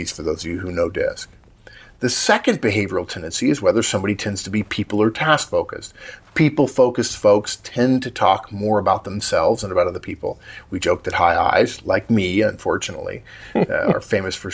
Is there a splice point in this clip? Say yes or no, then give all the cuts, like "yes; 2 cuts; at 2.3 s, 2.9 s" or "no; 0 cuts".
no; 0 cuts